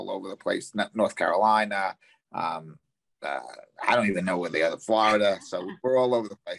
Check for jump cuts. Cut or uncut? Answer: uncut